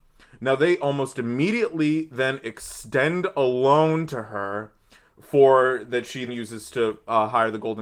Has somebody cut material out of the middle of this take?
yes; 1 cut; at 6.3 s

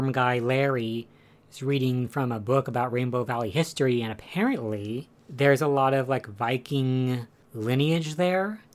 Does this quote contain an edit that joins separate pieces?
no; 0 cuts

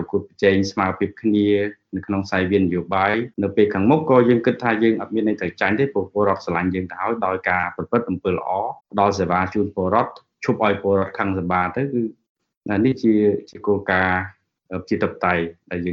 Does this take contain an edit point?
yes; 2 cuts; at 3.3 s, 8.8 s

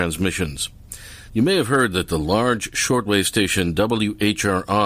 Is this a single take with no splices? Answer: no; 1 cut; at 1.3 s

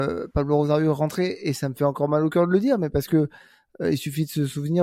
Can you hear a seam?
no; 0 cuts

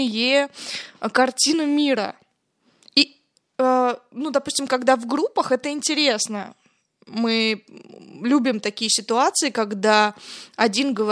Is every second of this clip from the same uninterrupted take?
yes; 0 cuts

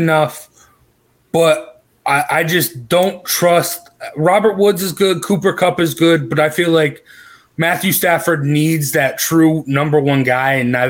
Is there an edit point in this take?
no; 0 cuts

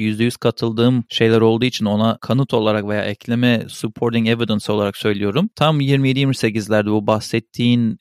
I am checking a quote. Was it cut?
no; 0 cuts

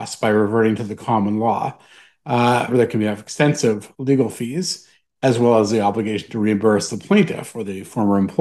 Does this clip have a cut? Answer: yes; 1 cut; at 2.7 s

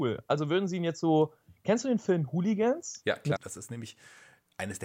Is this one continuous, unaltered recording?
no; 1 cut; at 3.4 s

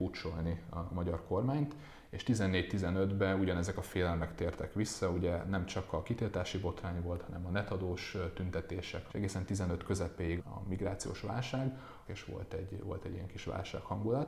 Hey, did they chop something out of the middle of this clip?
yes; 3 cuts; at 9.1 s, 10.4 s, 12.0 s

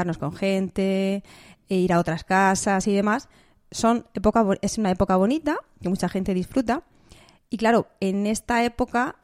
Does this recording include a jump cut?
no; 0 cuts

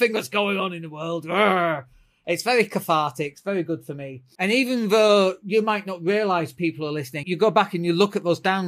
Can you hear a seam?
yes; 2 cuts; at 4.3 s, 7.2 s

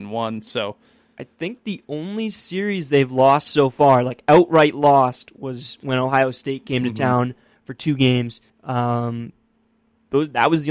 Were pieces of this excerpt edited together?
yes; 1 cut; at 8.5 s

